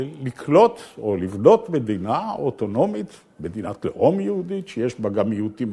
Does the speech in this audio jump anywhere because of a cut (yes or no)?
no